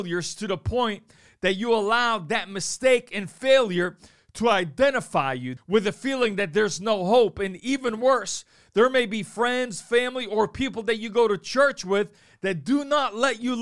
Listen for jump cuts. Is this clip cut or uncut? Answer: cut